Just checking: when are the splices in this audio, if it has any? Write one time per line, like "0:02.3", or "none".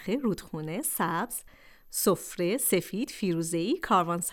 none

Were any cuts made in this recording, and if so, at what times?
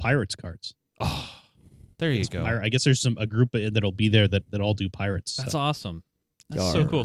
none

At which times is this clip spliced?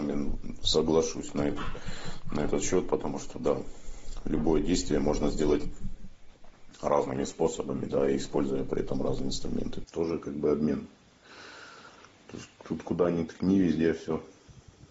0:09.8

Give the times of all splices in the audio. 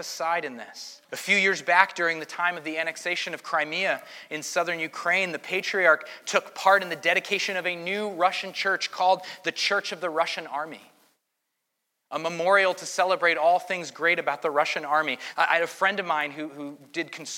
0:01.0
0:15.3

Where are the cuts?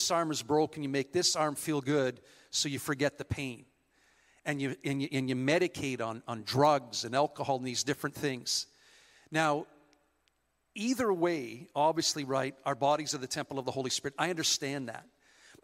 none

